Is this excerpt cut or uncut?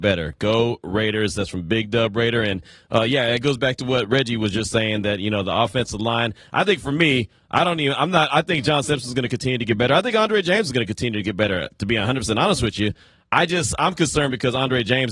uncut